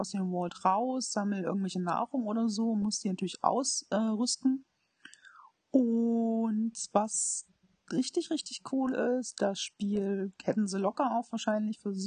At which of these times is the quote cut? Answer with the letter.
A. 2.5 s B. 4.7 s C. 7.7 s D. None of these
D